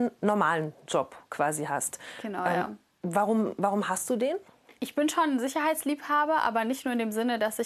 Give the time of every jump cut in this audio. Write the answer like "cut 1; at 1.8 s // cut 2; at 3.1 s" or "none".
none